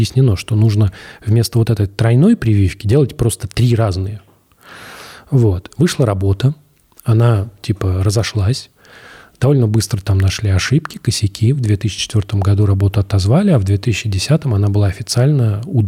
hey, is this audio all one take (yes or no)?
yes